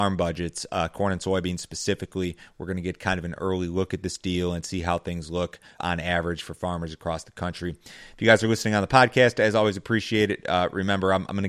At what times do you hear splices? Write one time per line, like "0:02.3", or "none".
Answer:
0:05.8